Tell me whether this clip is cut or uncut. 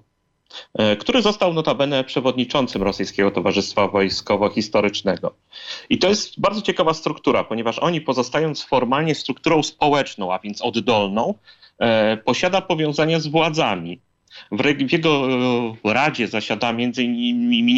uncut